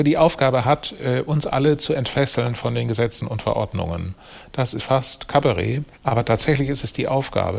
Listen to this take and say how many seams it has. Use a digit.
2